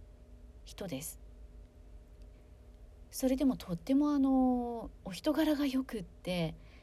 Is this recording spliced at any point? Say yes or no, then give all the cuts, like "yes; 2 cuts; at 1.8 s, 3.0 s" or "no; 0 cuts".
no; 0 cuts